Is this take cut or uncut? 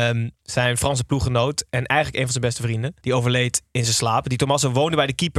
cut